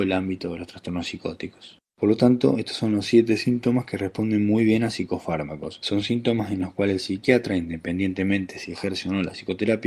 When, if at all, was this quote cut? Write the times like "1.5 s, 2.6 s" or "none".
none